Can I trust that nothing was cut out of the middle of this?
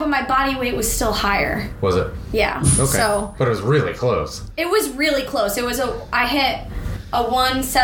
yes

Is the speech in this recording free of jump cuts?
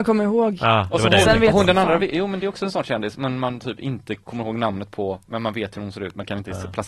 yes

